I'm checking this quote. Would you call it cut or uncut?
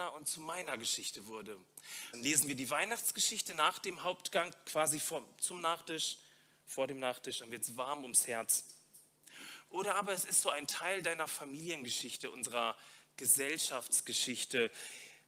cut